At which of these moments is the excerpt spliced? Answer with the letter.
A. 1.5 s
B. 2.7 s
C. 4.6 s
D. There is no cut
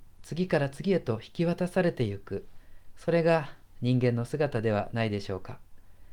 D